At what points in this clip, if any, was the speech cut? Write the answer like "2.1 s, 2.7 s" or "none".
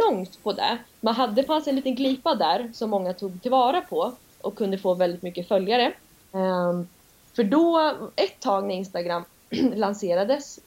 0.9 s, 6.2 s